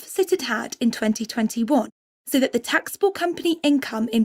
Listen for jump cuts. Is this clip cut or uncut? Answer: uncut